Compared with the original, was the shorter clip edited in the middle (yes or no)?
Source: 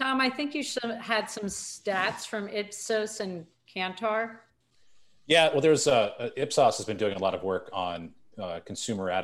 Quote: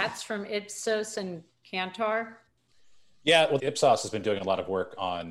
yes